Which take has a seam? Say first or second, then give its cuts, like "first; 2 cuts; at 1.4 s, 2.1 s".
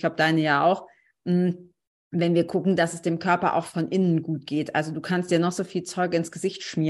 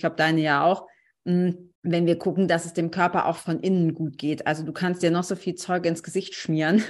second; 1 cut; at 1.8 s